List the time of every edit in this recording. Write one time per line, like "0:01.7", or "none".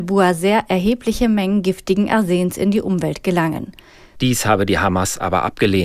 0:04.2